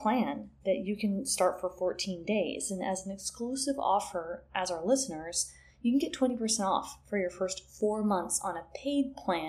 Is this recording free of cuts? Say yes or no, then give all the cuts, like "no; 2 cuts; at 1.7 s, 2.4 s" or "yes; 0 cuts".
yes; 0 cuts